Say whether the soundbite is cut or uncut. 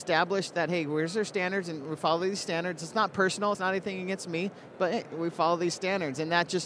uncut